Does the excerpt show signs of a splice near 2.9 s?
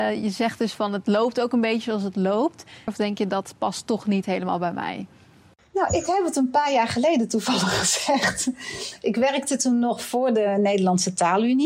yes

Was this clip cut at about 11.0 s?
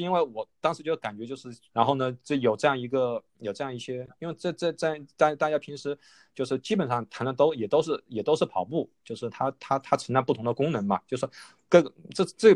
no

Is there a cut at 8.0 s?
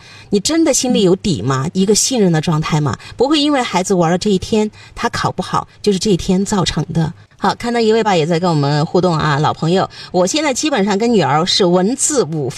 yes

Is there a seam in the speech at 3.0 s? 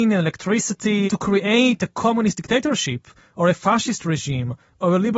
no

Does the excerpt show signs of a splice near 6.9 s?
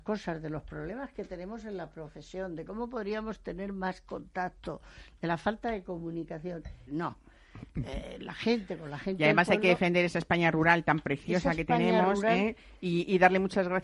yes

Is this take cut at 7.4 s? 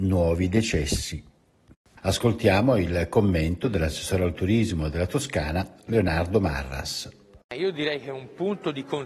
no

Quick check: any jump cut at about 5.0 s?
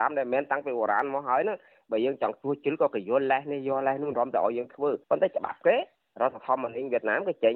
yes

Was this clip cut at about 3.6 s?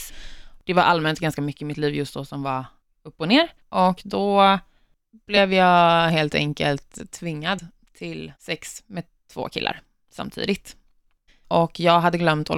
yes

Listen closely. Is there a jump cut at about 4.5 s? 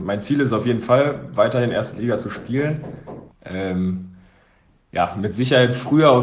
no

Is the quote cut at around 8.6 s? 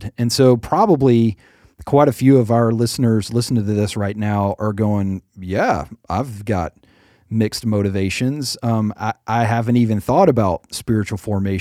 no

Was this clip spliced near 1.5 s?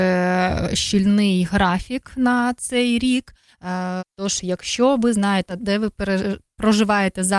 no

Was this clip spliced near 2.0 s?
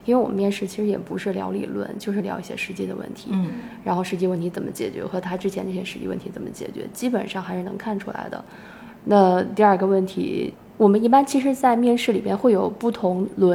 no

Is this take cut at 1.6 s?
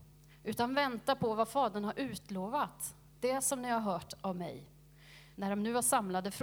no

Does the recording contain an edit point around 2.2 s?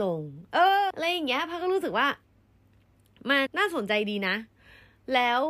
no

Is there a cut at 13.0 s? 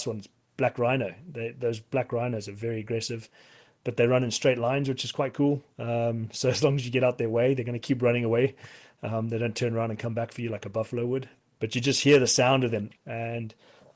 yes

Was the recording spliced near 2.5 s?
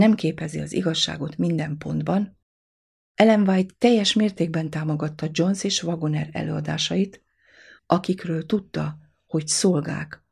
no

